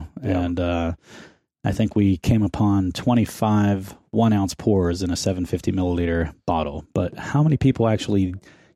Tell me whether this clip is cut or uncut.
uncut